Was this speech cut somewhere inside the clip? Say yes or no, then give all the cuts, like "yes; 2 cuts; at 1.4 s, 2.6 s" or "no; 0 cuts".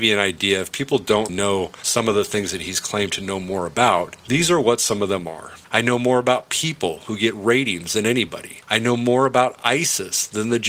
yes; 2 cuts; at 1.3 s, 5.6 s